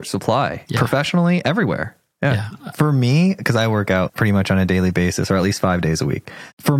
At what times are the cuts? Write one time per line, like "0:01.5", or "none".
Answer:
0:02.7
0:04.1